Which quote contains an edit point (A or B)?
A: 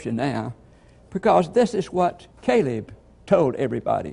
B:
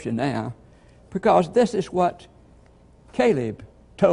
A